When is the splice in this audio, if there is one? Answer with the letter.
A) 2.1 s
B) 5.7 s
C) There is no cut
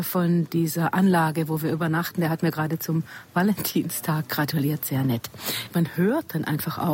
B